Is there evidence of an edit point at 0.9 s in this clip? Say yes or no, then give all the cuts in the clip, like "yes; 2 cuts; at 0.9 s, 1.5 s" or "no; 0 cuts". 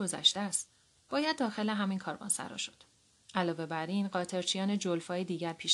yes; 1 cut; at 0.9 s